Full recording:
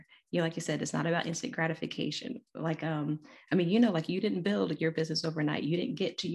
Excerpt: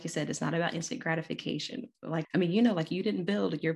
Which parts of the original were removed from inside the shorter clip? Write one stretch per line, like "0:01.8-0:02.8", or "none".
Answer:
0:02.8-0:03.4